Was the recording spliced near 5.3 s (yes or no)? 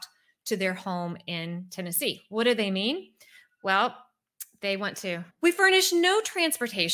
yes